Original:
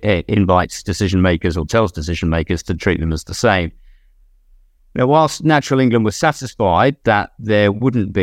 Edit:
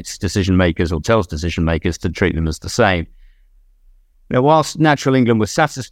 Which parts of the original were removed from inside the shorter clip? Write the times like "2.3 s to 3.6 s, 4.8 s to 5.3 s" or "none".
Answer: none